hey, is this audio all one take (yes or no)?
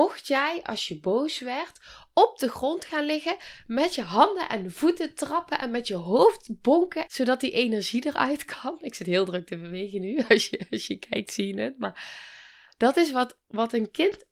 no